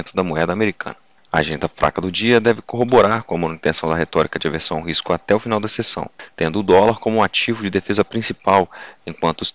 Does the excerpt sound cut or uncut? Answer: uncut